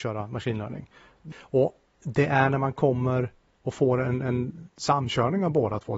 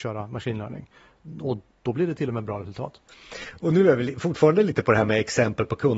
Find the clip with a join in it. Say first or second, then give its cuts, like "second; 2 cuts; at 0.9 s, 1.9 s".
first; 1 cut; at 1.3 s